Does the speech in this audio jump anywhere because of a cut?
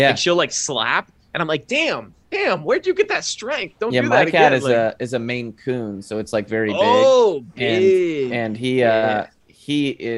no; 0 cuts

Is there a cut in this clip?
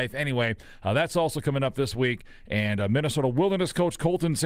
no; 0 cuts

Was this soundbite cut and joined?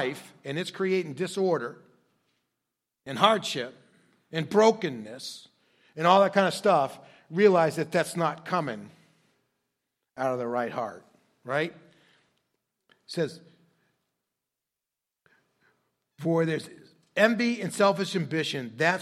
no; 0 cuts

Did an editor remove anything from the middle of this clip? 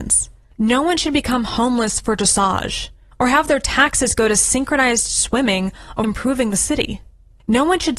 yes; 2 cuts; at 3.1 s, 6.0 s

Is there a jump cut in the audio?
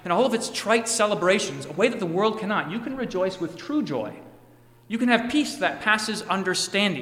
no; 0 cuts

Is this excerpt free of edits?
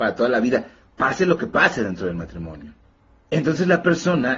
no; 1 cut; at 3.2 s

